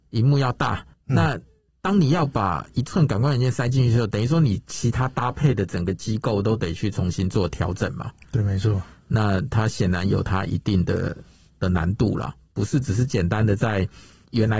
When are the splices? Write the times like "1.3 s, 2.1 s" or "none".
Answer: none